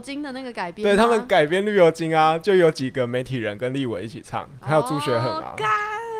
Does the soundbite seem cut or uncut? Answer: uncut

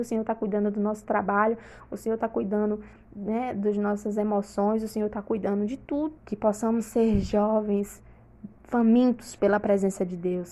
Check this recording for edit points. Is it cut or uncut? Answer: cut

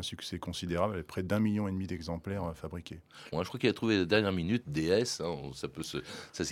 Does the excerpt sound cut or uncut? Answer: cut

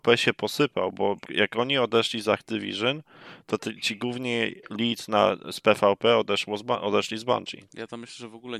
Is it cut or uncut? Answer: cut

